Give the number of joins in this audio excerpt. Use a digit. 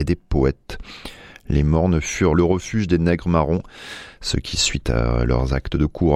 1